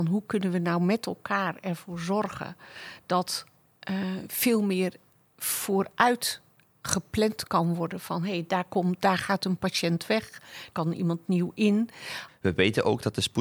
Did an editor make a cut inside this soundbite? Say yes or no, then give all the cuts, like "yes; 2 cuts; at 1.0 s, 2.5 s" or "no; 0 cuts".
yes; 2 cuts; at 10.7 s, 12.3 s